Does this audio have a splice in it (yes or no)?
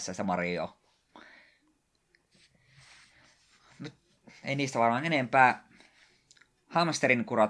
yes